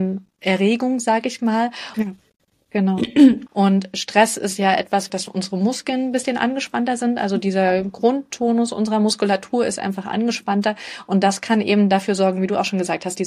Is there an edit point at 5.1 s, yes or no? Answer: yes